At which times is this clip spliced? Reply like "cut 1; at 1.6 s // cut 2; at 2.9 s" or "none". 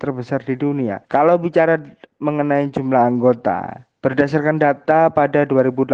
cut 1; at 1.0 s // cut 2; at 3.9 s